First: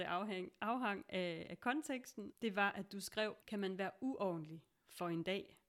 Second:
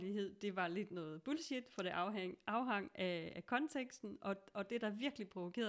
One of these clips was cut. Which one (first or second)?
first